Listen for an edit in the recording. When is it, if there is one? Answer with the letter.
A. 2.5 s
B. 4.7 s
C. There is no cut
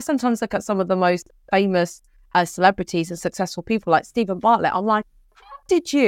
C